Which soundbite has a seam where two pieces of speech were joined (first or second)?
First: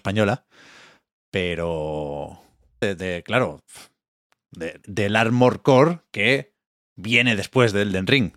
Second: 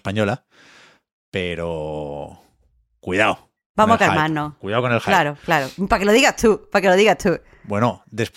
first